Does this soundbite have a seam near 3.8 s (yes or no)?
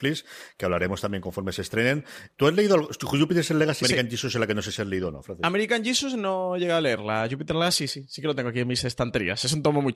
yes